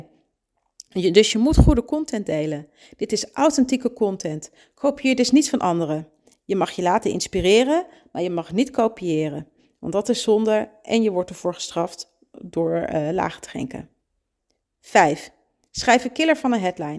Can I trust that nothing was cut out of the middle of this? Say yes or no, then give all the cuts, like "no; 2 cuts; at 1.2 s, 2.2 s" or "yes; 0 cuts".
yes; 0 cuts